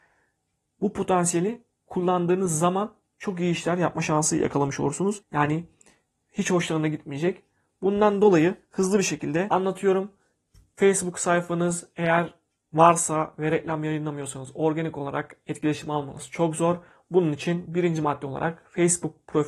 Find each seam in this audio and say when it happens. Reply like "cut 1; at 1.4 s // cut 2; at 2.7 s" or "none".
cut 1; at 5.2 s